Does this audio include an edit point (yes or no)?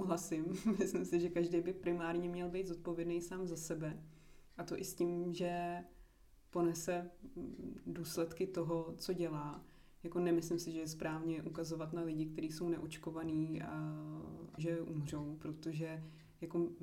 yes